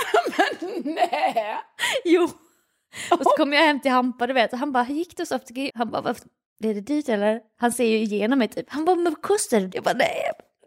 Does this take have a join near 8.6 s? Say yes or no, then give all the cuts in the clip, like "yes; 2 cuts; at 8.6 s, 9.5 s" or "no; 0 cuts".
yes; 3 cuts; at 5.7 s, 8.6 s, 9.7 s